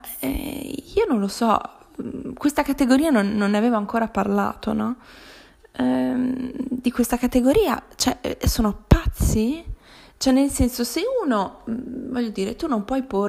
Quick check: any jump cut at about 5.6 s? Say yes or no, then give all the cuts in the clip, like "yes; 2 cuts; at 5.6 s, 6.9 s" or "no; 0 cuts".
no; 0 cuts